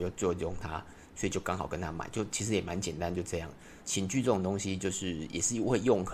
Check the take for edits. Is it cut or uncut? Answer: cut